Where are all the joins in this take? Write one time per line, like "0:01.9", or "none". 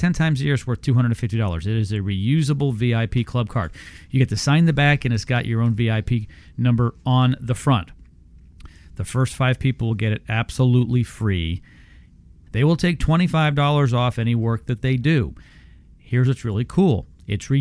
0:12.5